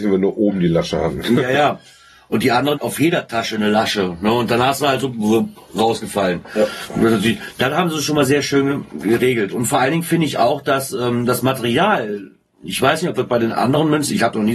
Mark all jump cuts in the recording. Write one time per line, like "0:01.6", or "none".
0:02.7

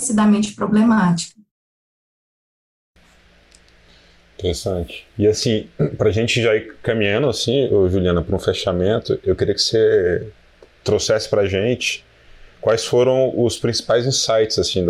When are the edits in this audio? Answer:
0:05.1

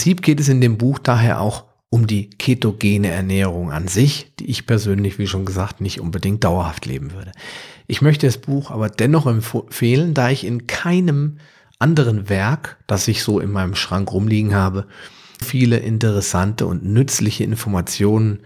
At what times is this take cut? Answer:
0:15.4

